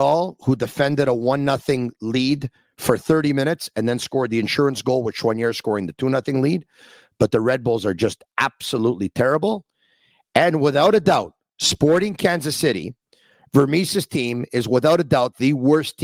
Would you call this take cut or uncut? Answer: uncut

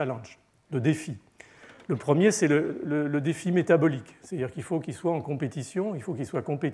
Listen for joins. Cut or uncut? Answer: uncut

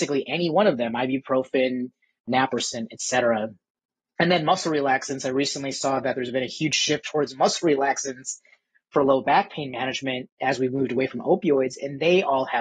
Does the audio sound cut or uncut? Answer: uncut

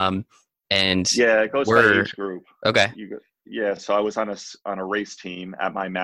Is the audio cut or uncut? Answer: uncut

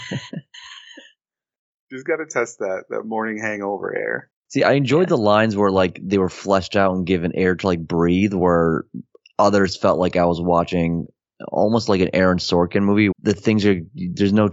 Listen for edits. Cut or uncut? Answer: cut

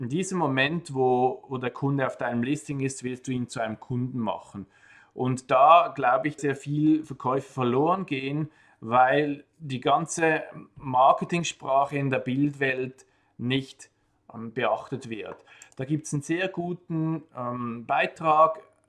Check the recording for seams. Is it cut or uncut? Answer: cut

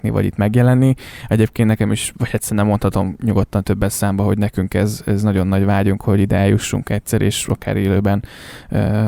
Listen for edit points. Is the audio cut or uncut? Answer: uncut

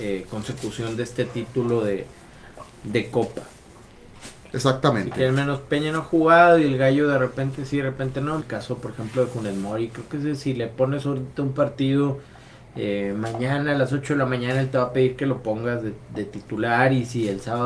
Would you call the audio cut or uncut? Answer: cut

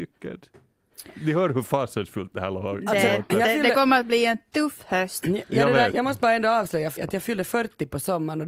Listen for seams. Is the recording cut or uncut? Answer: cut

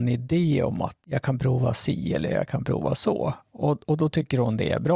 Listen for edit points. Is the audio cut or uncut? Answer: cut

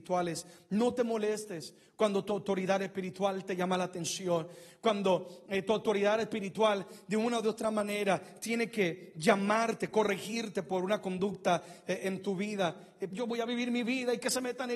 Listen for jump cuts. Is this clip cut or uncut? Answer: cut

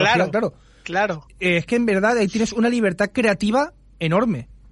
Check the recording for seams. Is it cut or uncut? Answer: cut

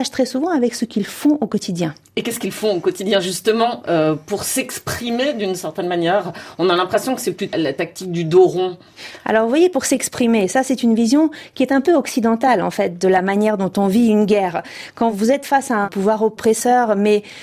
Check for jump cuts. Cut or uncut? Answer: cut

